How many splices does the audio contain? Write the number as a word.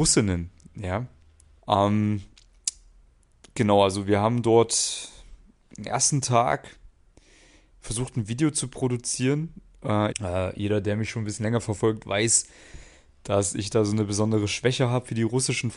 two